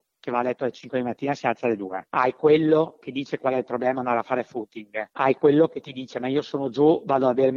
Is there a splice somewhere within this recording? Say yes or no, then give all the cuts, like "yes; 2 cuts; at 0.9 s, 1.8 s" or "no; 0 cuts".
no; 0 cuts